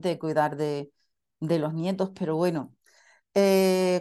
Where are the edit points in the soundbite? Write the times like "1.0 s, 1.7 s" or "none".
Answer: none

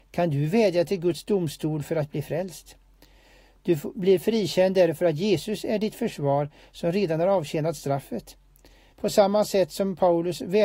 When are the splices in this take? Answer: 8.9 s

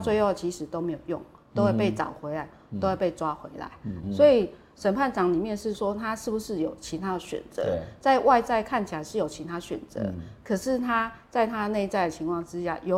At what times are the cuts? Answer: 4.0 s

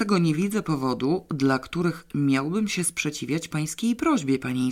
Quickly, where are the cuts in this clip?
none

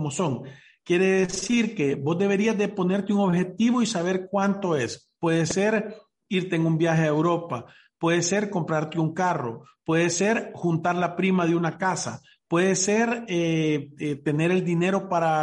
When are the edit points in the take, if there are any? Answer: none

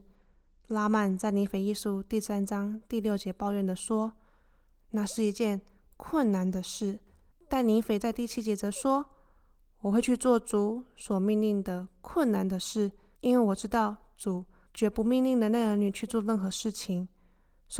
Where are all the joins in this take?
7.3 s

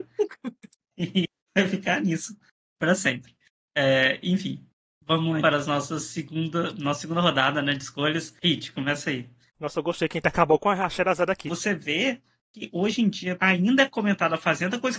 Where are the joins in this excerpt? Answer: 5.4 s, 11.5 s, 13.4 s

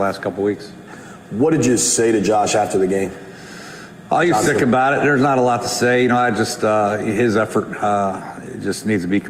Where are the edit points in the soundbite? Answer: none

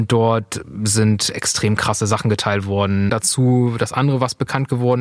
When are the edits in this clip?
3.1 s

